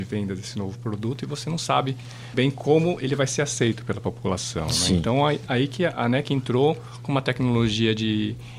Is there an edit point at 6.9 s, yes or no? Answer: no